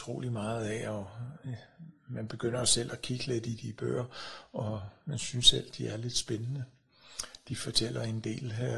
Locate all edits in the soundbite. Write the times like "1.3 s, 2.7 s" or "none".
none